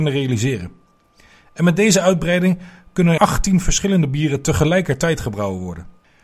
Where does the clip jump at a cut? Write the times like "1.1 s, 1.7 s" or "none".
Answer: 3.2 s